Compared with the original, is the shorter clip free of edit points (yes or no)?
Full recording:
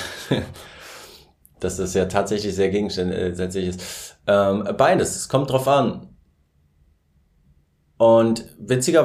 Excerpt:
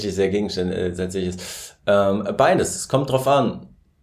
yes